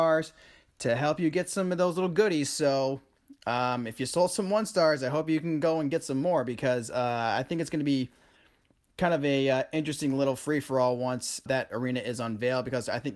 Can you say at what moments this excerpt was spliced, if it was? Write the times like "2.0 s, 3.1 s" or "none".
11.5 s